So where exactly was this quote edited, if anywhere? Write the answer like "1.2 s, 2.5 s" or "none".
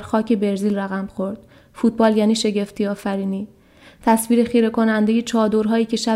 none